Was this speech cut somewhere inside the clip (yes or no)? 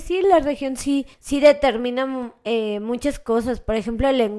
yes